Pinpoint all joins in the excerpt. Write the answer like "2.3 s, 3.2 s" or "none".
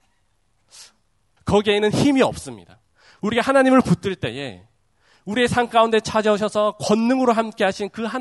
1.4 s

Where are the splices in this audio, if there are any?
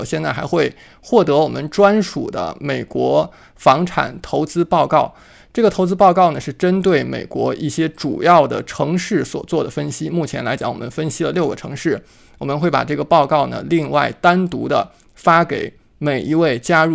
none

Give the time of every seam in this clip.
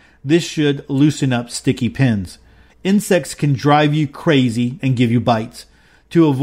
2.7 s, 4.8 s

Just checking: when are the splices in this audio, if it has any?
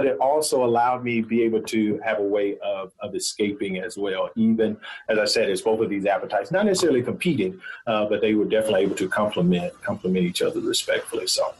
9.8 s

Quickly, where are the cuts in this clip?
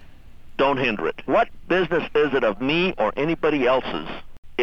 1.3 s

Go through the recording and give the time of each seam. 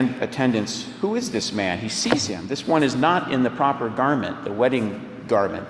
none

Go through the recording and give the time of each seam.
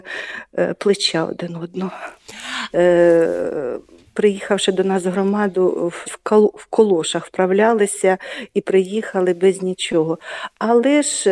2.7 s, 6.0 s

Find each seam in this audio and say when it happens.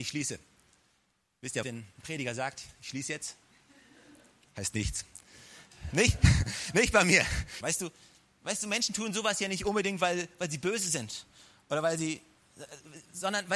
1.6 s, 7.6 s

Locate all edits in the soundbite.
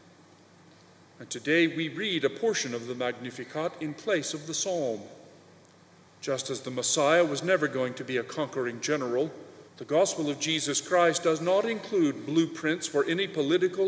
6.1 s, 9.7 s

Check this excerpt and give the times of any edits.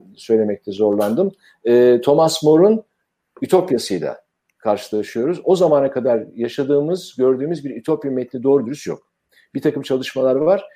none

